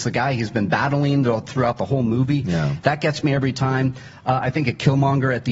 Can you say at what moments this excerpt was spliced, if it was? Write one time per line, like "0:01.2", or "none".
none